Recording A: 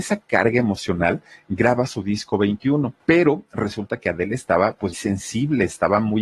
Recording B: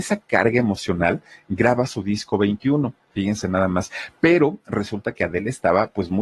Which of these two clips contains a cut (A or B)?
A